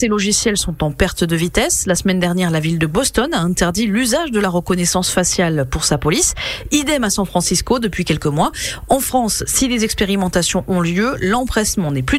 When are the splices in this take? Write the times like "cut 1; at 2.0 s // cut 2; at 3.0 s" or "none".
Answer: none